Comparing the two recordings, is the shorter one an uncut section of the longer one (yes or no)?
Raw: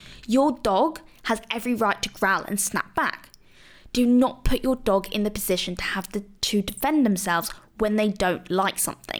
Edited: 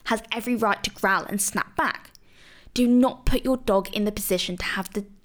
yes